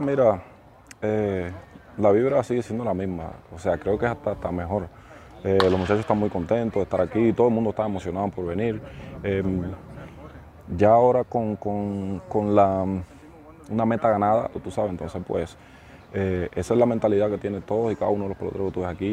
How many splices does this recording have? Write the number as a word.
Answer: one